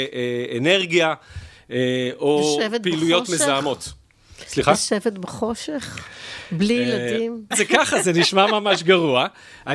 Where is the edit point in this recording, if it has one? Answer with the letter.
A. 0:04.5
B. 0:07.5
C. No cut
B